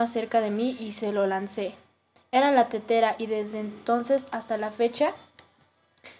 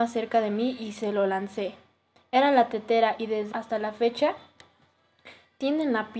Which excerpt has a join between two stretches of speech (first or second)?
second